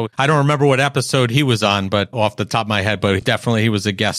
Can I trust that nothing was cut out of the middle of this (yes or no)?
yes